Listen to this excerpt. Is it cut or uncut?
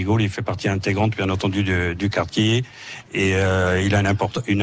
uncut